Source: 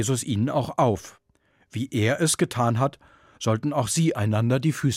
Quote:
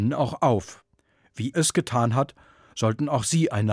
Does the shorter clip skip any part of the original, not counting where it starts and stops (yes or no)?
yes